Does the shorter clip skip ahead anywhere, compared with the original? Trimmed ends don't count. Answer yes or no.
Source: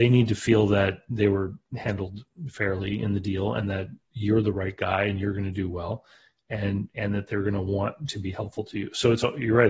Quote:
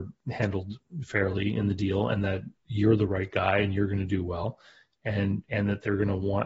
no